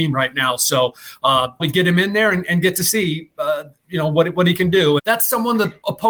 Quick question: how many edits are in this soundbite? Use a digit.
2